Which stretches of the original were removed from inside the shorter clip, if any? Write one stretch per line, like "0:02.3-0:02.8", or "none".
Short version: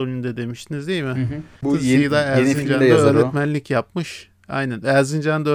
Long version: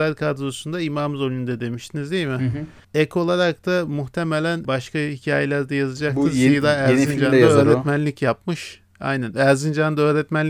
0:02.9-0:06.1